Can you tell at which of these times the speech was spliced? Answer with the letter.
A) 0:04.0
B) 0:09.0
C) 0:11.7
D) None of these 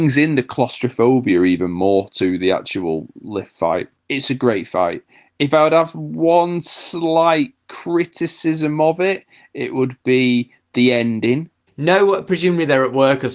C